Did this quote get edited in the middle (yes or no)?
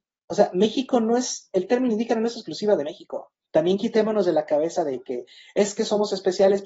yes